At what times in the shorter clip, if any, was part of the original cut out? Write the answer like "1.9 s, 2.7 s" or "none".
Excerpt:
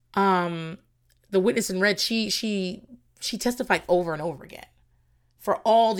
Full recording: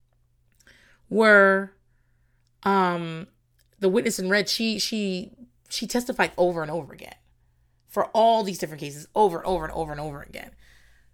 none